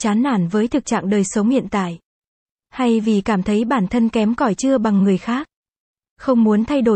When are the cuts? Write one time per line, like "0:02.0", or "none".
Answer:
0:06.0